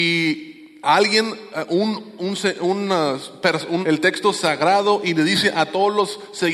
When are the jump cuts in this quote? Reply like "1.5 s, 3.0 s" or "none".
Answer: 3.8 s